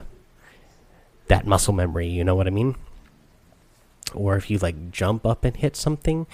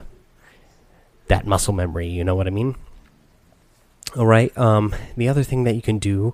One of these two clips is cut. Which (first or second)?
first